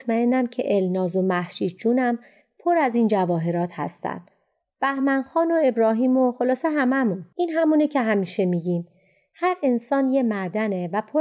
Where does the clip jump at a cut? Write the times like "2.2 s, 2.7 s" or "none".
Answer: 7.3 s